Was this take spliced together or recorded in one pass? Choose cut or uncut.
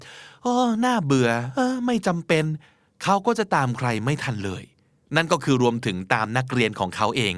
uncut